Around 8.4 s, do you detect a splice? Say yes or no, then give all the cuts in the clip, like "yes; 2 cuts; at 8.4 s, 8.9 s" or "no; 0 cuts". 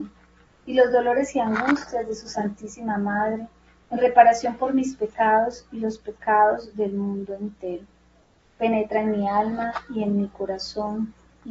yes; 1 cut; at 8.4 s